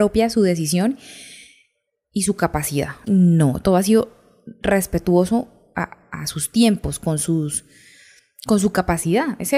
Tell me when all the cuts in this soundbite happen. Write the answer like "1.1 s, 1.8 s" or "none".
3.1 s